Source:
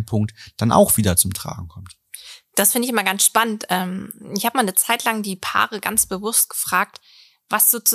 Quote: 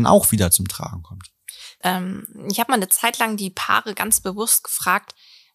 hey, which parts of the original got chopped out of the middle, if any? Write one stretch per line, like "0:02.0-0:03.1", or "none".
0:02.5-0:03.7